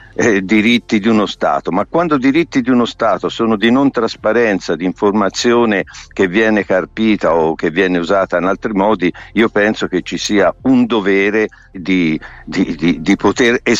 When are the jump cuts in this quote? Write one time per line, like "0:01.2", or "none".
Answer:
0:11.7